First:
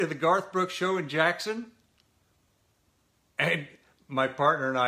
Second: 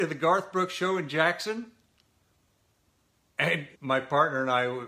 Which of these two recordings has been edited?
second; 1 cut; at 3.8 s

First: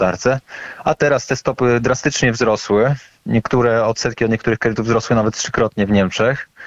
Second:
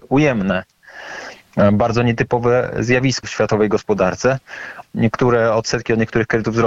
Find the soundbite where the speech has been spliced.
second; 2 cuts; at 3.2 s, 4.8 s

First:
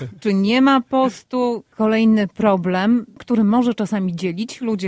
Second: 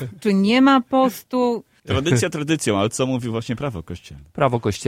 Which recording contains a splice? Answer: first; 1 cut; at 1.7 s

